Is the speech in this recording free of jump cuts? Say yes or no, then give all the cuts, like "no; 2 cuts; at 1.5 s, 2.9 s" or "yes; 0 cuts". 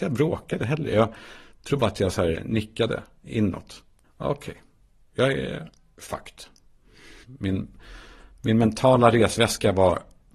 no; 2 cuts; at 4.0 s, 7.2 s